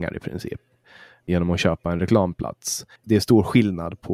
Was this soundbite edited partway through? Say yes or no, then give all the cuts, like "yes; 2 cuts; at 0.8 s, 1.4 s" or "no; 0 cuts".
yes; 1 cut; at 3.0 s